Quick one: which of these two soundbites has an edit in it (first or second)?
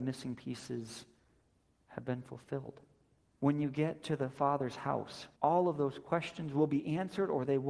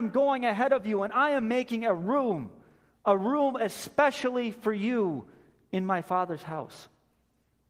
first